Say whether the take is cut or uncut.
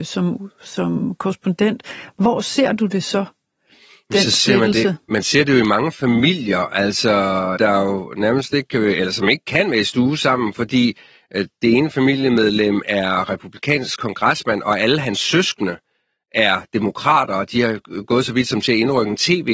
cut